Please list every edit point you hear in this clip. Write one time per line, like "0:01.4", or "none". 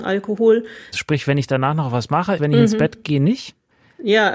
0:00.9
0:02.4